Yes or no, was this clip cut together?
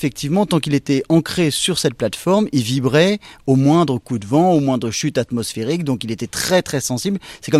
no